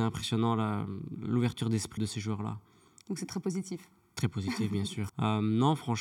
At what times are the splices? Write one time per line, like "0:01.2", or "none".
0:02.0
0:05.1